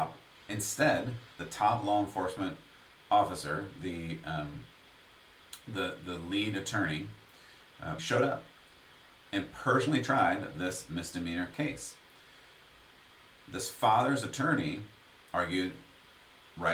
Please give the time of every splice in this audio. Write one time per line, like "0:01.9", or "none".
0:08.0

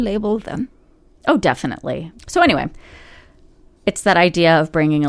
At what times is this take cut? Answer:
0:02.2

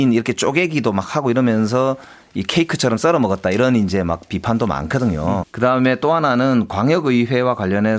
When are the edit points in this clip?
0:05.4

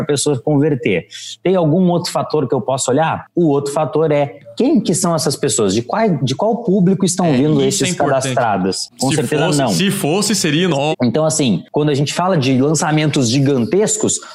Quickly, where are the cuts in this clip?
0:06.2
0:08.9
0:10.9

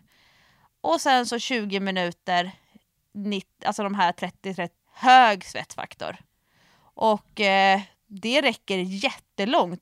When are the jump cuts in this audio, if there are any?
0:04.8

